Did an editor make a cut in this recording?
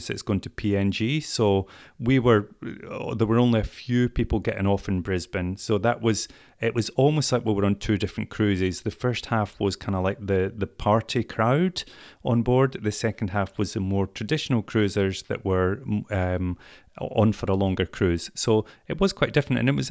no; 0 cuts

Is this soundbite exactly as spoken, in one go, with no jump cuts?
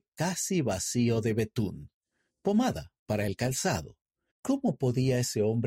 no; 1 cut; at 4.3 s

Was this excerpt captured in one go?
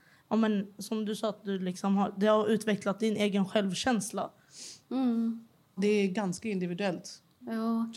no; 1 cut; at 5.8 s

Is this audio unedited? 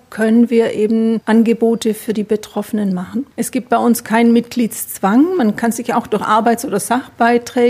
yes; 0 cuts

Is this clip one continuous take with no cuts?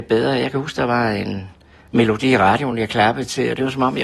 yes; 0 cuts

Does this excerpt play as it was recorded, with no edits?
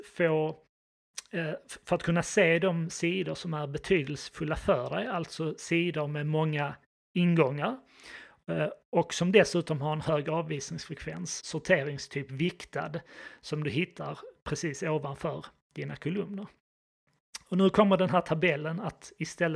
no; 1 cut; at 11.4 s

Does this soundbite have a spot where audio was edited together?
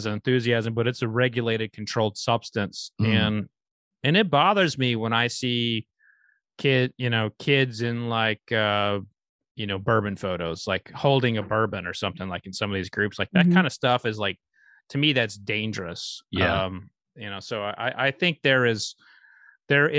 no; 0 cuts

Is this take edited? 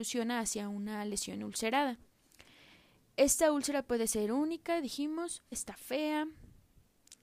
yes; 1 cut; at 5.5 s

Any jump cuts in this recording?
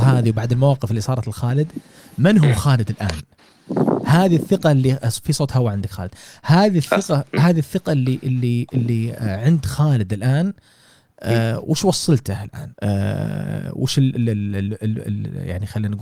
yes; 1 cut; at 12.7 s

